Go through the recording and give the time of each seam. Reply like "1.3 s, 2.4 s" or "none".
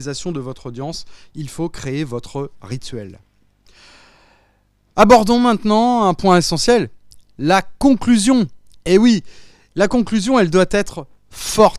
none